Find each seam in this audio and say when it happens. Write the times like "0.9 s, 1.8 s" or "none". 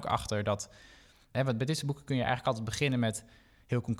none